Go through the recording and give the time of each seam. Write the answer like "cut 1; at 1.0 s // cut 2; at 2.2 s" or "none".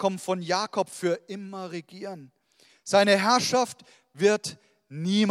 none